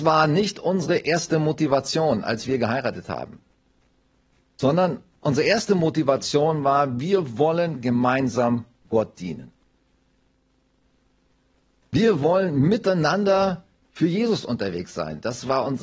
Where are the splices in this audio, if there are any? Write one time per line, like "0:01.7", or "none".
none